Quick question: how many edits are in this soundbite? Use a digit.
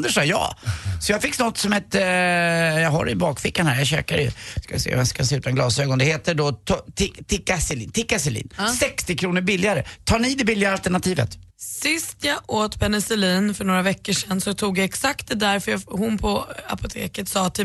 1